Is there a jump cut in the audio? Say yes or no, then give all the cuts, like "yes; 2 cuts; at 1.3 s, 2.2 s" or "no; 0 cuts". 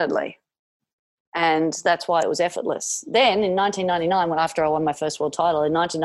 no; 0 cuts